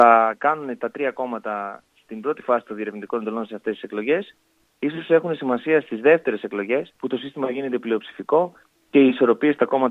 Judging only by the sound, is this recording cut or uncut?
cut